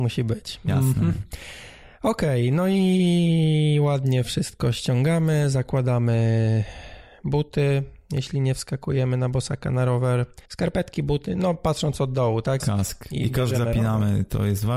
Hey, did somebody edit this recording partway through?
yes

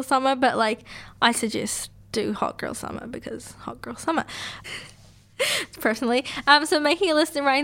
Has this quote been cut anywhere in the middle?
yes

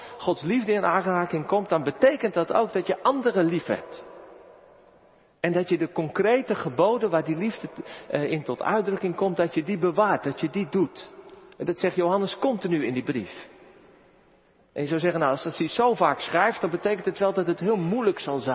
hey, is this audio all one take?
yes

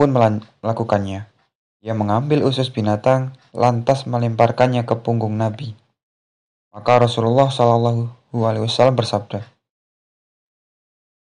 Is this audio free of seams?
yes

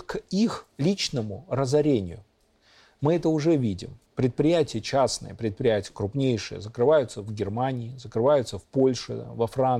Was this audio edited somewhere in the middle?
yes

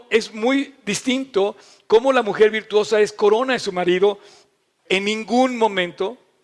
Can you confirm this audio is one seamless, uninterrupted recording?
no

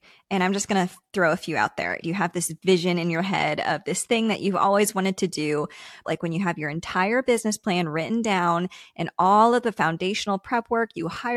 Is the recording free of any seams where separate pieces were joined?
no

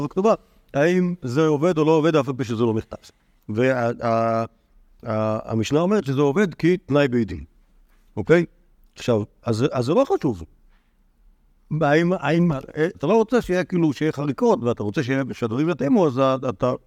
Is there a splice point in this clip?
yes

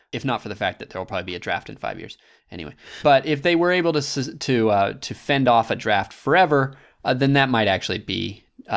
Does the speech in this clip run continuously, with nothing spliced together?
no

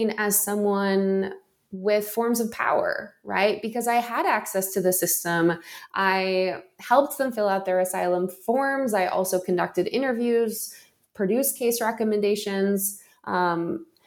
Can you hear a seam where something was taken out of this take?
no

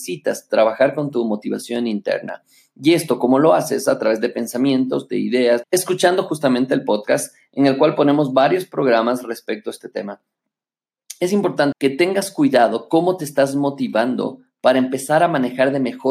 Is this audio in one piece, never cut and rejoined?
no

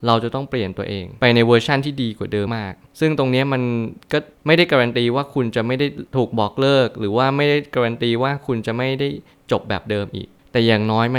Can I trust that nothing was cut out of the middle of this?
no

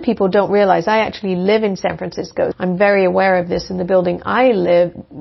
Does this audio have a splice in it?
yes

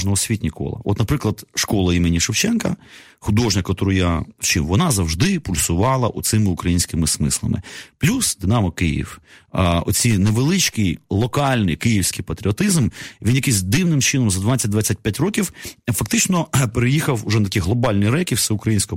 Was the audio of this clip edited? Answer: no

